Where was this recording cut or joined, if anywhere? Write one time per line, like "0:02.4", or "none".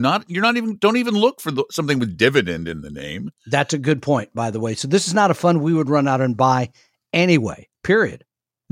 none